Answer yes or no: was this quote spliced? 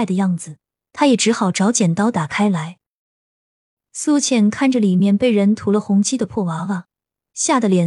no